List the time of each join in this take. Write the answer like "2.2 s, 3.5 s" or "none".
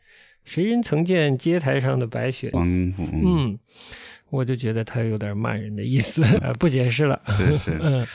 2.5 s, 6.4 s